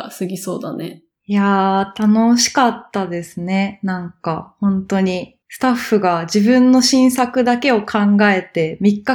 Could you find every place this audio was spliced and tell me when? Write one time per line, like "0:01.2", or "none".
0:05.4